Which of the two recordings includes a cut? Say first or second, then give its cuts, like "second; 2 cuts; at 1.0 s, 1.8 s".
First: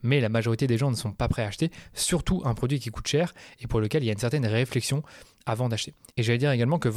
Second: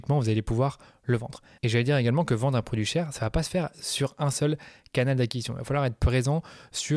second; 1 cut; at 1.6 s